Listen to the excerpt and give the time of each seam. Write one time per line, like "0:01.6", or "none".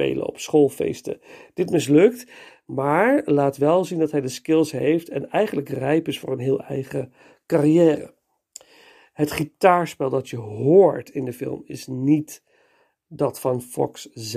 none